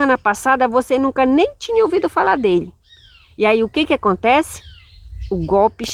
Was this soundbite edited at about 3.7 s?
no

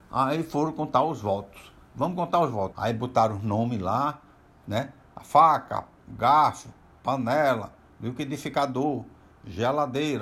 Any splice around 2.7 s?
yes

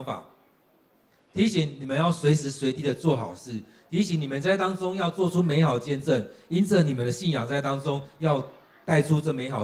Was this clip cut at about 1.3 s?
yes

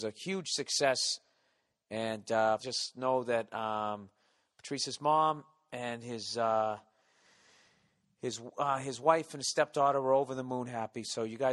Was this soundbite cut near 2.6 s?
yes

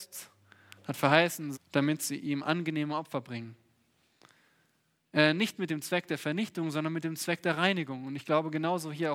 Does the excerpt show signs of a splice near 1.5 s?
yes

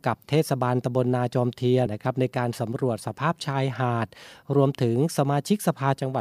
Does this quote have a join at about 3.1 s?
no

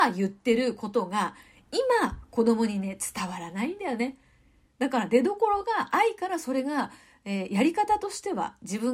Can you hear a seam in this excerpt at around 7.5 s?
no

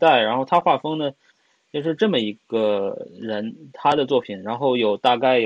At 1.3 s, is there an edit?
yes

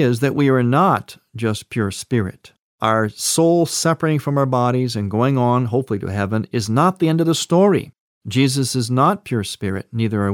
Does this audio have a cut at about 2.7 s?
no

